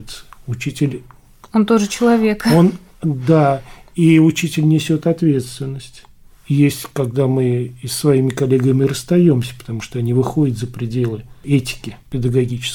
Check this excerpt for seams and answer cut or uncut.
uncut